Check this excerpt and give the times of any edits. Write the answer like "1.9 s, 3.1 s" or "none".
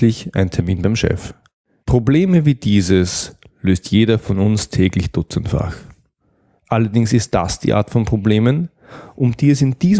1.8 s